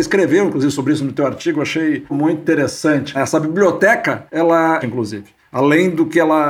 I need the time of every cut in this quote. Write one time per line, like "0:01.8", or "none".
0:02.1
0:03.1
0:04.8